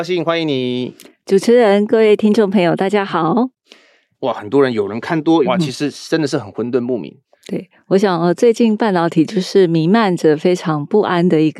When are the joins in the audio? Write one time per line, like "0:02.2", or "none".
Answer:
0:04.1
0:05.4